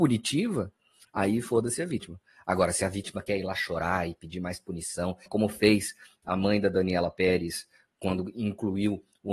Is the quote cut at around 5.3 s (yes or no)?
yes